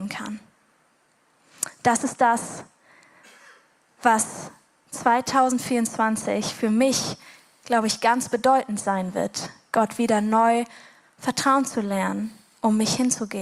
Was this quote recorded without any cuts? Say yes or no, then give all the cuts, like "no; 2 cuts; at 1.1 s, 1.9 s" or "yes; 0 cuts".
yes; 0 cuts